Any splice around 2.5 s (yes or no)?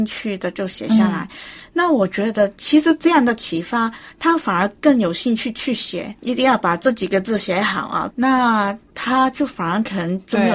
no